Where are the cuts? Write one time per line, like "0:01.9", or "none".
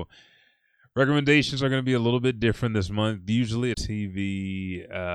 0:03.7